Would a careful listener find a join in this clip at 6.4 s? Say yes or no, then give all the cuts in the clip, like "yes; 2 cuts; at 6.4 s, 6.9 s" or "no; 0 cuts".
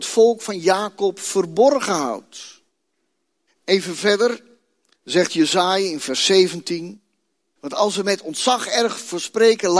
no; 2 cuts; at 3.5 s, 7.6 s